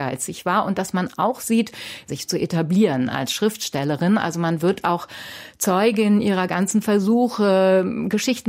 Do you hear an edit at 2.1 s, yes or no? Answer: yes